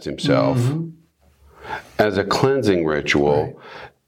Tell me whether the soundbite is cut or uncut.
uncut